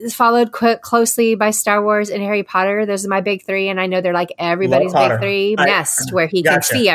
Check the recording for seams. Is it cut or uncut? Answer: cut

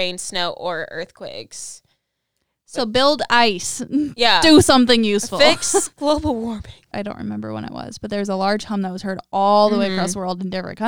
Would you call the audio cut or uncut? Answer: cut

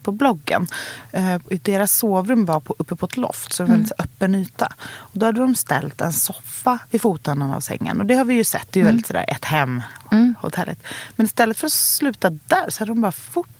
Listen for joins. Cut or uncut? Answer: uncut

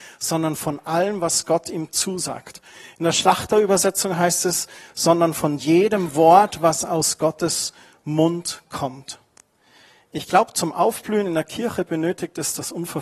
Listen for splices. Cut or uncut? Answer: uncut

